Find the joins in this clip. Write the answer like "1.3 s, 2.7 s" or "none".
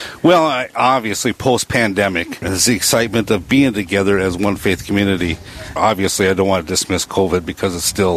2.4 s, 5.8 s